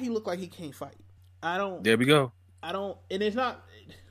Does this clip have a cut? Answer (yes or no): no